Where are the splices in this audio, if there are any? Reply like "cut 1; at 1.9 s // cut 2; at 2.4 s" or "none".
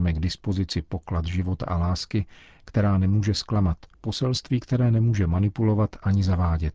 cut 1; at 3.9 s